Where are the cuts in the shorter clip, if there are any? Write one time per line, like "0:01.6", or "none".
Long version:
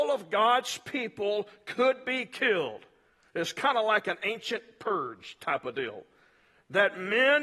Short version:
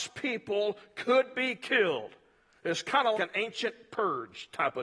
0:03.1